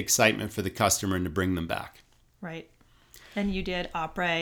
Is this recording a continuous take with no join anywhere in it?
yes; 0 cuts

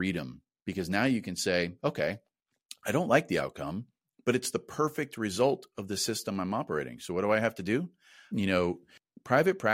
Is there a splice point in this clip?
yes; 1 cut; at 8.3 s

